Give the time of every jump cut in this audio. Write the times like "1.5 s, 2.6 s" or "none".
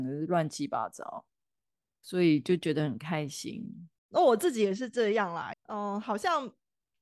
4.0 s, 5.5 s